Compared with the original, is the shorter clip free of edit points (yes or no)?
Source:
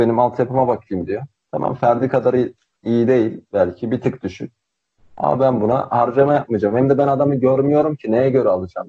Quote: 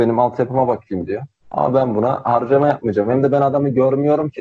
no